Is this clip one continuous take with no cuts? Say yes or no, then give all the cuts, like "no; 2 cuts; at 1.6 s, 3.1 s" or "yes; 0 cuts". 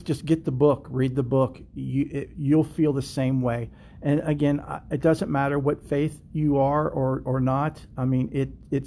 yes; 0 cuts